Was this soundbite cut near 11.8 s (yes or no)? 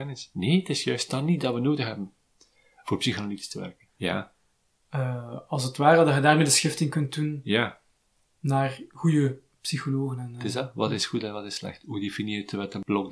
no